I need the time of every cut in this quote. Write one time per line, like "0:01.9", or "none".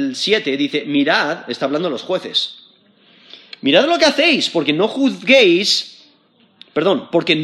none